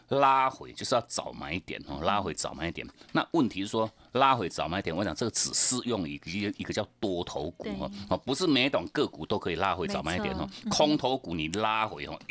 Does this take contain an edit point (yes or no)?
no